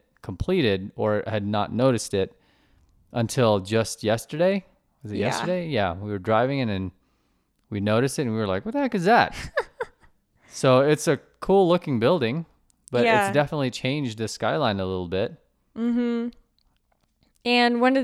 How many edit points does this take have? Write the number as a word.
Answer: zero